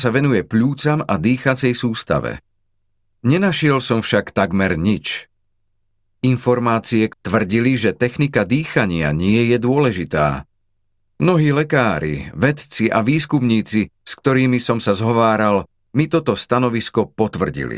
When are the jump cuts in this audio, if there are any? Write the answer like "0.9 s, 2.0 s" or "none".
7.1 s